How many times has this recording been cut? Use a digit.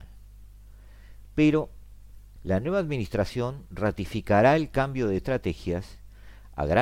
1